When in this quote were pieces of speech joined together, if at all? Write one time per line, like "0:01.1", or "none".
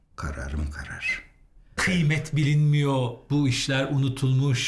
0:01.8